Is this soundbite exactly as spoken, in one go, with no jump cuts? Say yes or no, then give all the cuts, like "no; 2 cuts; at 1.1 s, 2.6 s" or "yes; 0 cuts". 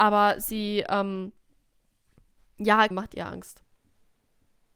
no; 1 cut; at 2.9 s